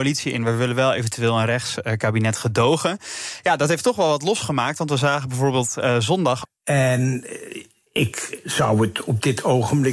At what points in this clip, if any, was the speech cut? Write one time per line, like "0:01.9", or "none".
0:06.5